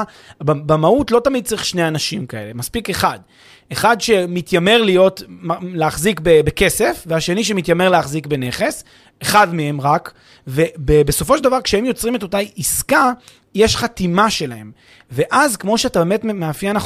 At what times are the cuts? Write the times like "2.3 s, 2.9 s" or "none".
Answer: none